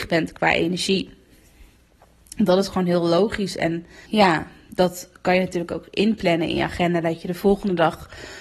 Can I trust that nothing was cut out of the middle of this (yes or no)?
no